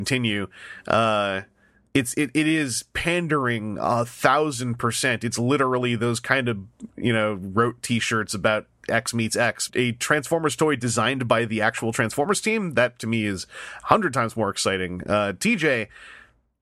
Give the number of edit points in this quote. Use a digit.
1